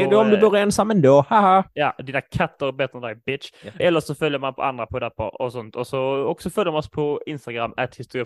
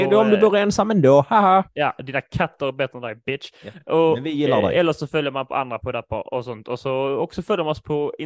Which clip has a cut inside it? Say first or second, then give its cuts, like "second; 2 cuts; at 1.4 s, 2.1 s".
first; 1 cut; at 3.8 s